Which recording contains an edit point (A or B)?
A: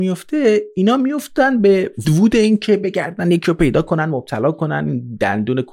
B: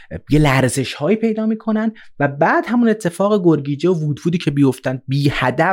A